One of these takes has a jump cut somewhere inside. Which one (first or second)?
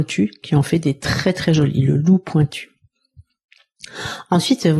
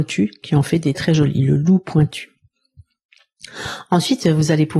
second